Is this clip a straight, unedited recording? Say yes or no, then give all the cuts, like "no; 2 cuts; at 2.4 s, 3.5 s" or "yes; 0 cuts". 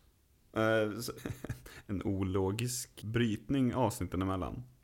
no; 2 cuts; at 1.2 s, 3.0 s